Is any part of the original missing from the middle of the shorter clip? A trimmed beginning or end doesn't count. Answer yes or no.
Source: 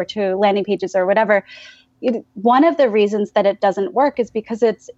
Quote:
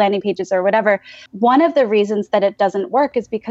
yes